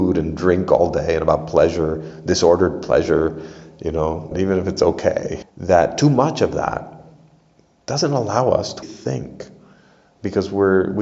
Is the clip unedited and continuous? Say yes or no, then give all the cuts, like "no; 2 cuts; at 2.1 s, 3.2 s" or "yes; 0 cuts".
no; 3 cuts; at 4.3 s, 5.4 s, 8.8 s